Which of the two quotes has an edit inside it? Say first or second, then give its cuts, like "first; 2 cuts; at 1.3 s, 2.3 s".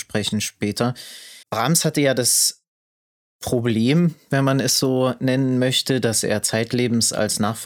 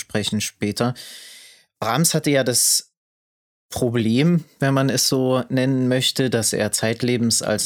first; 1 cut; at 1.4 s